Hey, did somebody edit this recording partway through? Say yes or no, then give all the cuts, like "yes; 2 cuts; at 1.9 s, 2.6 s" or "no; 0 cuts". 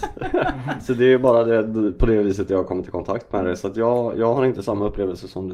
no; 0 cuts